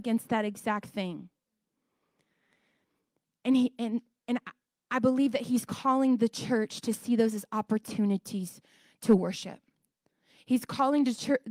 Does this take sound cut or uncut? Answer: uncut